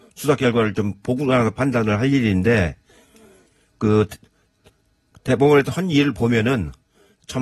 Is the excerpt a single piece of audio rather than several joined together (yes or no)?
yes